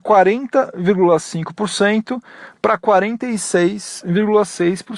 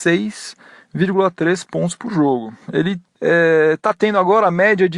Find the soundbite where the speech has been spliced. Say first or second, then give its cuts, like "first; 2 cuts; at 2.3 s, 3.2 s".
second; 1 cut; at 2.6 s